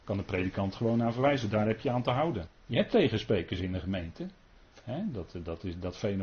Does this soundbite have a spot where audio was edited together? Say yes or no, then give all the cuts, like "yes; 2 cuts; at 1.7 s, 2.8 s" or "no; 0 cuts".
yes; 1 cut; at 2.5 s